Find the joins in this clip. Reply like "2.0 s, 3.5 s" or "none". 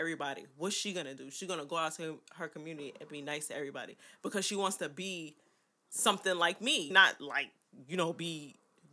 6.9 s